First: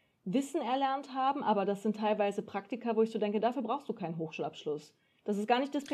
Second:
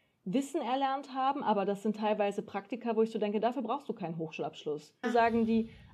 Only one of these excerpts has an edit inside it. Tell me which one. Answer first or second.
second